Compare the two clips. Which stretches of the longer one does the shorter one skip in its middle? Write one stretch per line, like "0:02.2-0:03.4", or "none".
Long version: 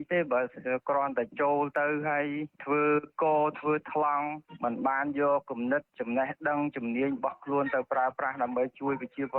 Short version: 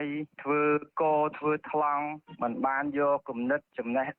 none